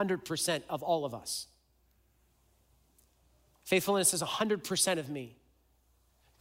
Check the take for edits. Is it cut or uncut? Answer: uncut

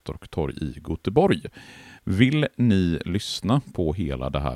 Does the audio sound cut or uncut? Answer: uncut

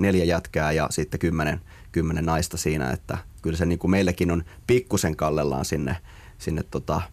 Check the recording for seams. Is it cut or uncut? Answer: uncut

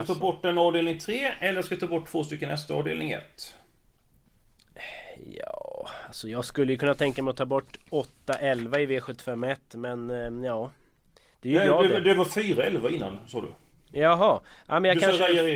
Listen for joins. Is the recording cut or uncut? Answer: uncut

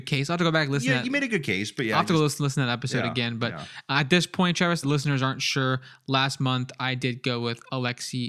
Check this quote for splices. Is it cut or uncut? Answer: cut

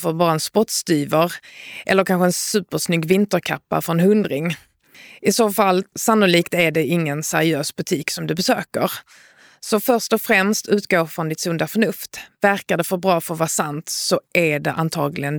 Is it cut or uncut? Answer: cut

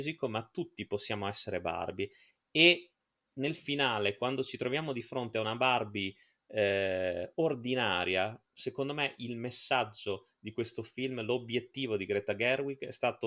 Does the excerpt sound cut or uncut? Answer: uncut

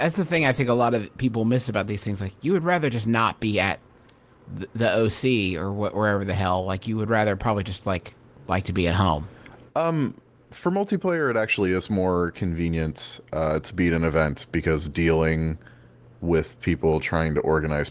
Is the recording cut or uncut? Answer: uncut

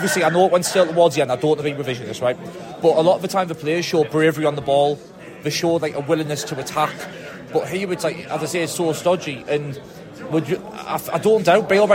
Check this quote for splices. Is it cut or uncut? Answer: uncut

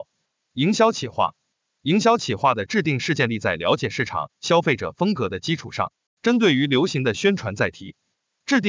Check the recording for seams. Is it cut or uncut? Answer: uncut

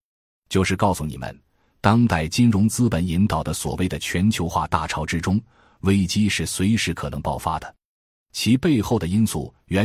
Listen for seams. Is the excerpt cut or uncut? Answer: uncut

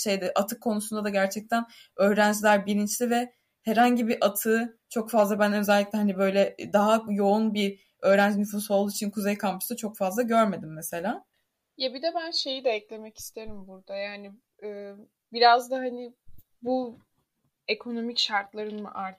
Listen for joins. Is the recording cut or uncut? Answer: uncut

